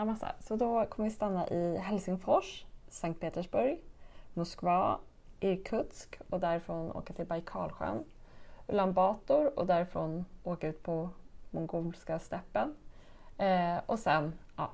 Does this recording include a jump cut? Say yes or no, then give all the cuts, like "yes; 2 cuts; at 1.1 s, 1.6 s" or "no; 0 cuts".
no; 0 cuts